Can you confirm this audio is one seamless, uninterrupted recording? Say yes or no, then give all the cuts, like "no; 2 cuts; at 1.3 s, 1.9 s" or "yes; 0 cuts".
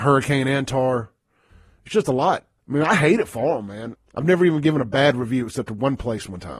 no; 2 cuts; at 2.6 s, 3.9 s